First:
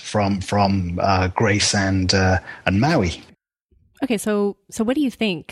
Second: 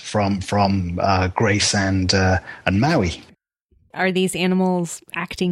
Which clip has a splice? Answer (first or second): second